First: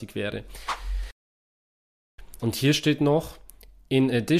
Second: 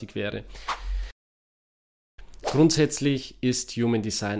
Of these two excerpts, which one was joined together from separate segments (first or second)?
first